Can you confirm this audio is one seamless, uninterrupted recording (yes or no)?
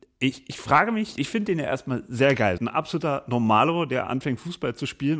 no